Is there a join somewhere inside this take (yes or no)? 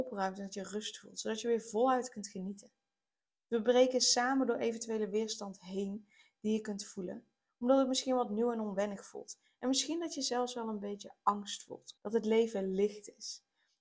yes